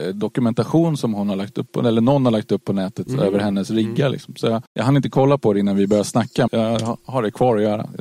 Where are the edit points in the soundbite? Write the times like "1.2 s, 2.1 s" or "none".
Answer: 4.7 s, 6.5 s